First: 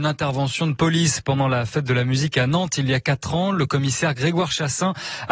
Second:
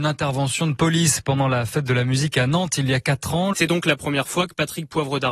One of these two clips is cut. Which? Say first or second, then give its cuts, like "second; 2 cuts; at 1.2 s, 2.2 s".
second; 1 cut; at 3.5 s